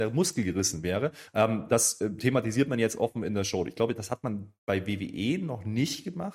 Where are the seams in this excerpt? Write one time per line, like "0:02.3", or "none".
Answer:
0:01.3